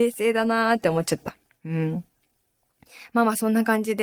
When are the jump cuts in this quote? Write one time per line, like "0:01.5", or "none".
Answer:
none